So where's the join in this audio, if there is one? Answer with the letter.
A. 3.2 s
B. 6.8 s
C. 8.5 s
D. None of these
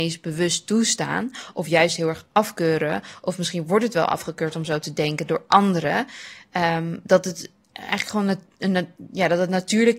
D